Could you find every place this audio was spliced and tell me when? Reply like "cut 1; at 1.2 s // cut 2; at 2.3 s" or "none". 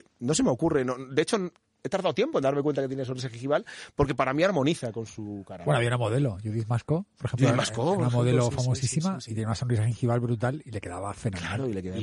none